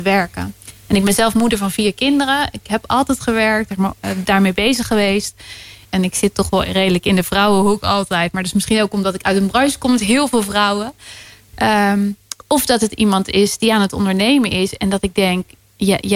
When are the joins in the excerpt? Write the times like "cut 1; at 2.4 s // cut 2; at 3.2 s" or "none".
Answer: cut 1; at 3.7 s // cut 2; at 5.9 s